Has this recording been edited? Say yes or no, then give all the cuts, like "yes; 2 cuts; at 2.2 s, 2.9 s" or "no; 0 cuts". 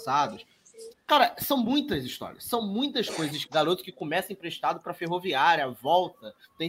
yes; 2 cuts; at 0.9 s, 3.5 s